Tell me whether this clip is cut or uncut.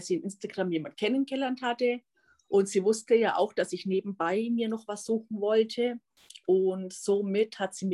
uncut